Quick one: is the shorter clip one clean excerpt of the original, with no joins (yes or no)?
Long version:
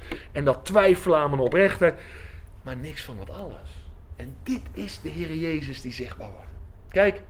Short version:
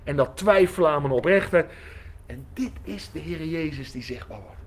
no